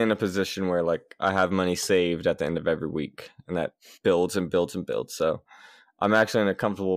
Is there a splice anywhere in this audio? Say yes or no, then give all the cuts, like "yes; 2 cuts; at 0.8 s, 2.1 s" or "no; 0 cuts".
no; 0 cuts